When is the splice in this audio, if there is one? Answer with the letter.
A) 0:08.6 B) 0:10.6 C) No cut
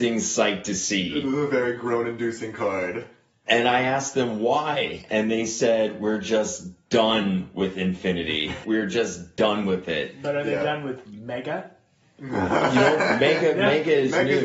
A